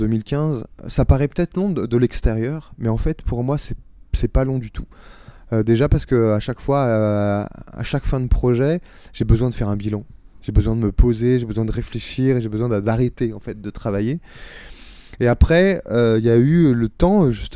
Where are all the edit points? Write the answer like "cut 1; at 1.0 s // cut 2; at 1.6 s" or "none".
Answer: none